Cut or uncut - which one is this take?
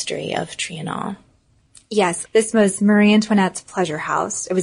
cut